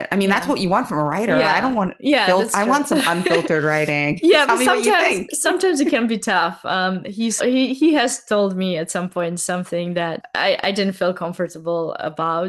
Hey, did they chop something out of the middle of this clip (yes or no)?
yes